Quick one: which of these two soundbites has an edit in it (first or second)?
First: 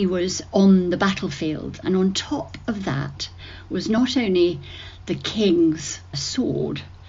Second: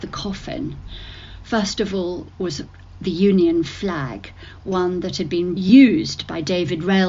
first